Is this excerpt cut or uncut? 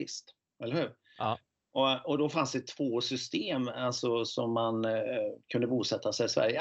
cut